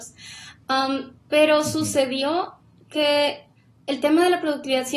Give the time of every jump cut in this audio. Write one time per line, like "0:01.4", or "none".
none